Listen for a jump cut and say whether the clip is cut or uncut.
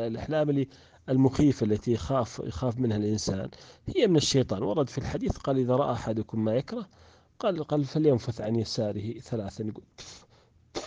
uncut